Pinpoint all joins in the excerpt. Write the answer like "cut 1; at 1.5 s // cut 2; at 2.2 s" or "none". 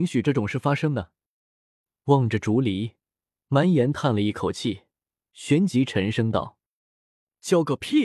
none